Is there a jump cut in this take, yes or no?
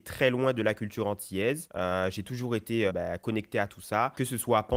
yes